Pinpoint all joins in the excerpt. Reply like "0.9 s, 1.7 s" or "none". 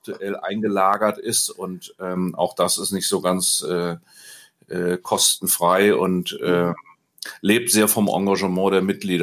none